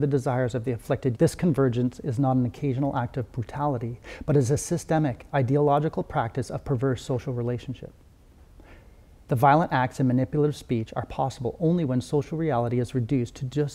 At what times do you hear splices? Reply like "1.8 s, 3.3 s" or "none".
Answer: 1.1 s